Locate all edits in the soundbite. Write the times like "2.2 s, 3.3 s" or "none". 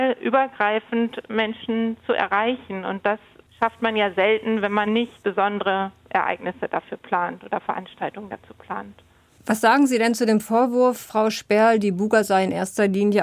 4.9 s